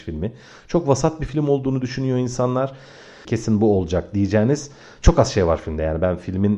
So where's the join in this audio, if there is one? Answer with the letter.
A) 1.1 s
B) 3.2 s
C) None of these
B